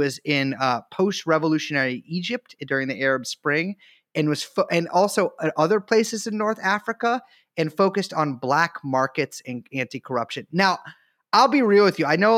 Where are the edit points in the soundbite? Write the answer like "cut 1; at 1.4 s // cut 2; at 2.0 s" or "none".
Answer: none